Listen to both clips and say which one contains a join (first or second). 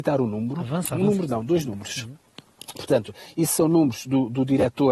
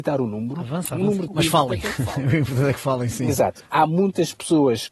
second